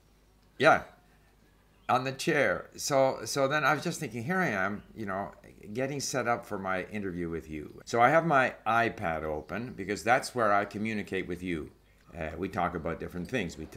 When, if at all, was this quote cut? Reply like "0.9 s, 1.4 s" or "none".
7.8 s, 12.0 s